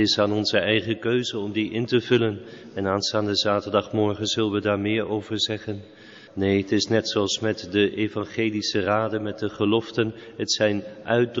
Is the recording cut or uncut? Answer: cut